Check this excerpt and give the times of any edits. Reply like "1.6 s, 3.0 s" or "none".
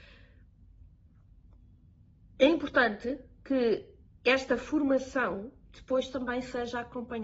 none